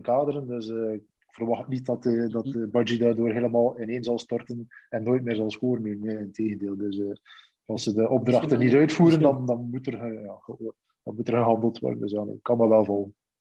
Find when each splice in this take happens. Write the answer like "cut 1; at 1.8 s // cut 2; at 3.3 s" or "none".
none

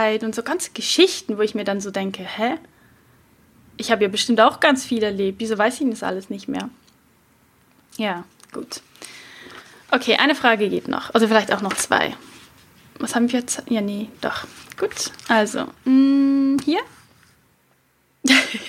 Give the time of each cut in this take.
none

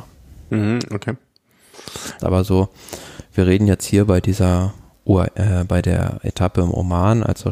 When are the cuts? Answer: cut 1; at 2.2 s

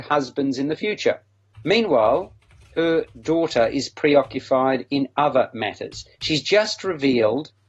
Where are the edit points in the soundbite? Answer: cut 1; at 1.5 s

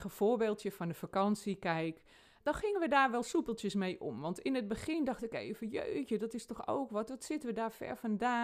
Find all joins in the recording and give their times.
cut 1; at 2.4 s

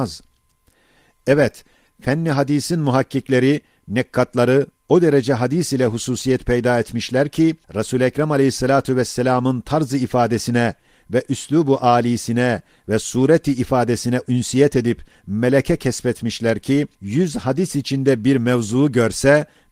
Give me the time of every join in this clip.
cut 1; at 7.6 s // cut 2; at 16.9 s

